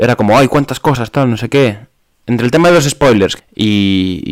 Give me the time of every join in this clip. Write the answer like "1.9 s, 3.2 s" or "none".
2.2 s, 3.4 s